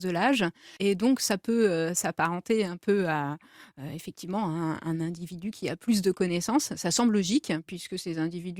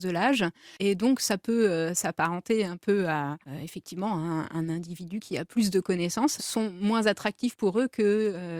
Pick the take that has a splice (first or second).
second